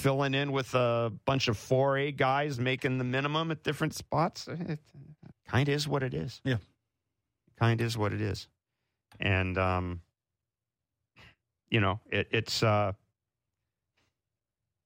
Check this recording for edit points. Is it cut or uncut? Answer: cut